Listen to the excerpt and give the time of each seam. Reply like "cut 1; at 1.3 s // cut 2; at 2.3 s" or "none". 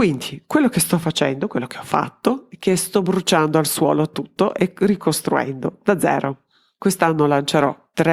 none